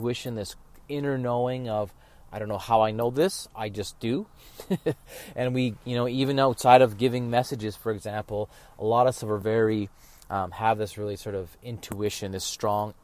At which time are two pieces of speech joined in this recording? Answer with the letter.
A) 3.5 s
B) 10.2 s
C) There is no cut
C